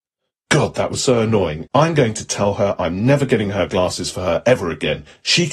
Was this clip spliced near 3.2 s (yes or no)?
no